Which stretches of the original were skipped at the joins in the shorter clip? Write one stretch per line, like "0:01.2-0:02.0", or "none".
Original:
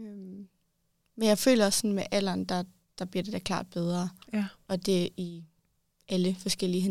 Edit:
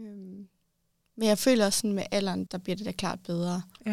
0:02.5-0:02.9

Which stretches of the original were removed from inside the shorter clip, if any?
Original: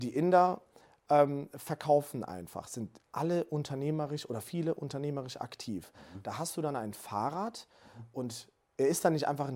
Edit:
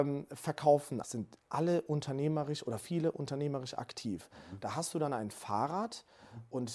0:02.3-0:02.7

